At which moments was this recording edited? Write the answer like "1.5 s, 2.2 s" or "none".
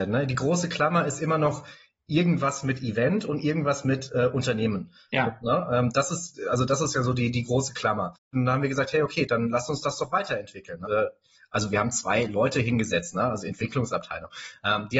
8.3 s, 10.8 s